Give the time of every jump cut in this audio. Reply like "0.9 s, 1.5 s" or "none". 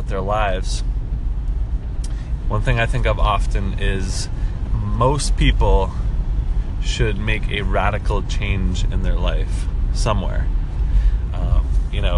2.4 s, 4.7 s, 11.3 s